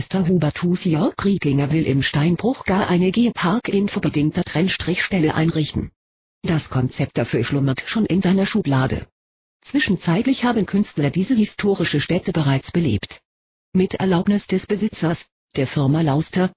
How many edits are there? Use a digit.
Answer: 0